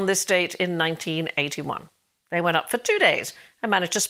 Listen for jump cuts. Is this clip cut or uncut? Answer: uncut